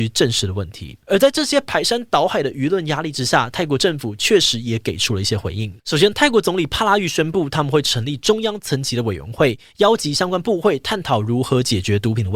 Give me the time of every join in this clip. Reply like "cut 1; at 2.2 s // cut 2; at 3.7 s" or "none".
cut 1; at 1.0 s // cut 2; at 5.8 s